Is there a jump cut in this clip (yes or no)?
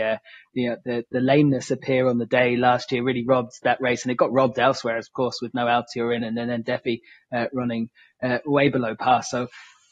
no